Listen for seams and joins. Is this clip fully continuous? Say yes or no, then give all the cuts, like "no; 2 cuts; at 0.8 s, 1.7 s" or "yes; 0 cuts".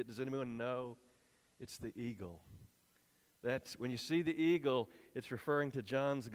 yes; 0 cuts